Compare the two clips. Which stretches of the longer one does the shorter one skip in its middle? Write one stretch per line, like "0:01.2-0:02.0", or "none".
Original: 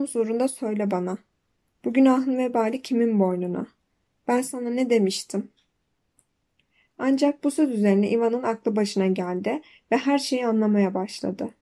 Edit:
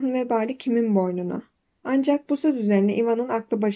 0:04.0-0:06.9